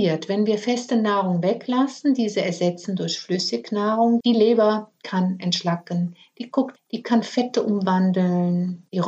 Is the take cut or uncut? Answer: cut